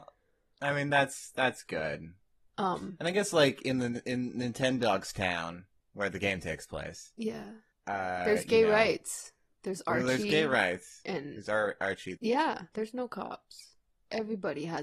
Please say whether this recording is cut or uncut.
cut